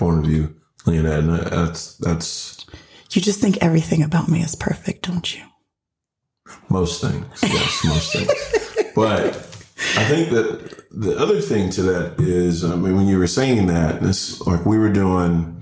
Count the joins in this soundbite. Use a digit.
0